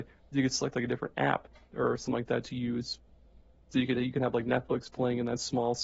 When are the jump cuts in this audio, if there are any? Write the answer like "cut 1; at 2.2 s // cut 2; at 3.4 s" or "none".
none

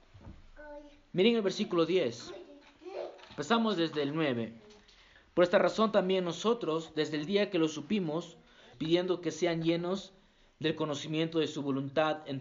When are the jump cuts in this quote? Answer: cut 1; at 8.7 s

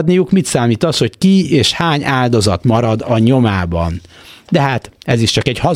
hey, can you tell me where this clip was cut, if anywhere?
none

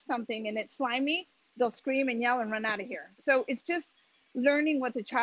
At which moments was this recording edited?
none

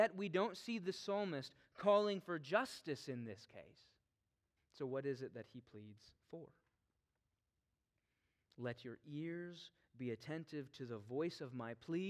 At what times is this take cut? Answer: cut 1; at 4.6 s

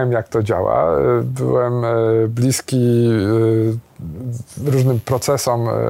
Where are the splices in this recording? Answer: none

